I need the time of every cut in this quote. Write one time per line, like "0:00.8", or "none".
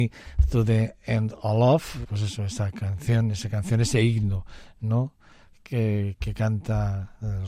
0:02.0

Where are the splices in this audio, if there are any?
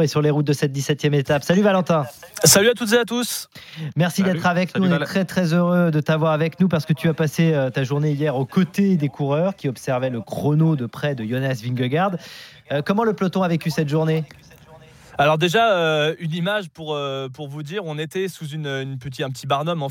none

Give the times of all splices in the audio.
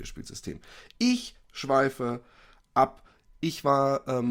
none

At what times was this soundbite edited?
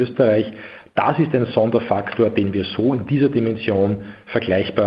none

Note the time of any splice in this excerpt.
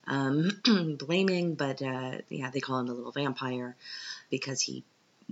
0:02.5
0:04.3

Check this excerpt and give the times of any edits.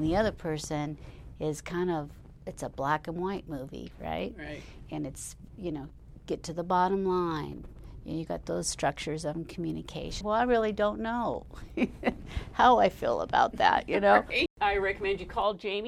0:10.2
0:14.5

